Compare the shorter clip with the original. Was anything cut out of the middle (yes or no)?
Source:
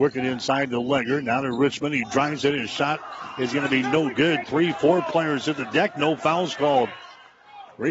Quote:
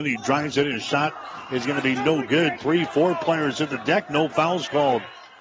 no